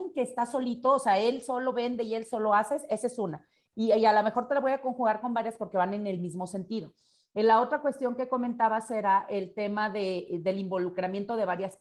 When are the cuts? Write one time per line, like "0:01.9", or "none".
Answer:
none